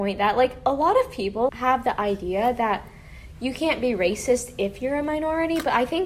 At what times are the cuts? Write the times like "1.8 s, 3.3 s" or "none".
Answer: 1.5 s